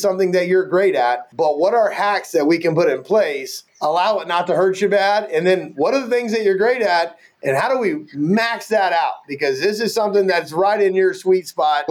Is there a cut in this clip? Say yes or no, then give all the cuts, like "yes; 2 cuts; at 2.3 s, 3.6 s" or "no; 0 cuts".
no; 0 cuts